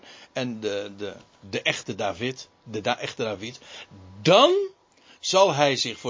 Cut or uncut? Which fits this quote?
cut